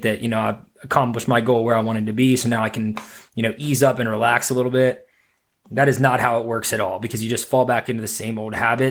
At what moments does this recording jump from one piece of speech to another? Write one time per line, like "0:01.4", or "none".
none

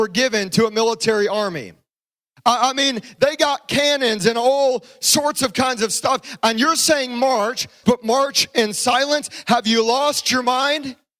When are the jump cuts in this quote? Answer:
0:07.8

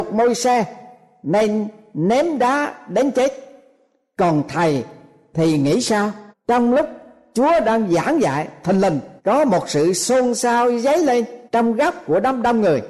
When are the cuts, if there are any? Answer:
0:06.3
0:09.2
0:11.5

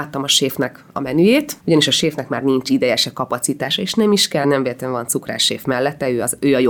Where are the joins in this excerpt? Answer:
0:01.6
0:04.4

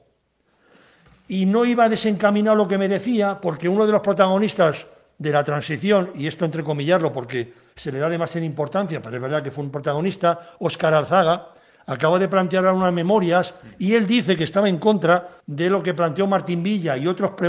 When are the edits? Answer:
0:15.4

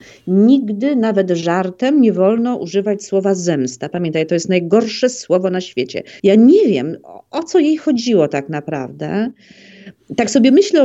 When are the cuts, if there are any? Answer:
0:06.2

